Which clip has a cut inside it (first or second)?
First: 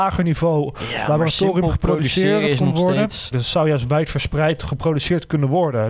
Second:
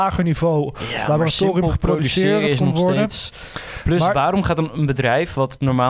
first